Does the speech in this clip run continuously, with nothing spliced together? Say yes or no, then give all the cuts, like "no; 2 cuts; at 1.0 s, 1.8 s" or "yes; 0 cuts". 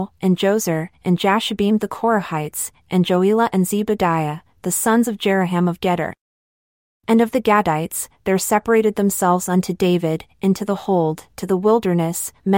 yes; 0 cuts